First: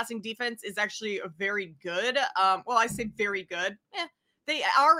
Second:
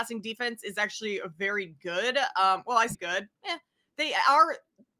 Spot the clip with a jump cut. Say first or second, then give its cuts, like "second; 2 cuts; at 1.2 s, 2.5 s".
second; 1 cut; at 2.9 s